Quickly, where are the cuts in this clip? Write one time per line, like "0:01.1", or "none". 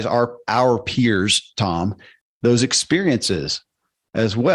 0:02.2